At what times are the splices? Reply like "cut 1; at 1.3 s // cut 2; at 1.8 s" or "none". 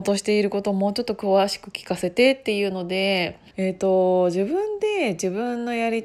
cut 1; at 3.5 s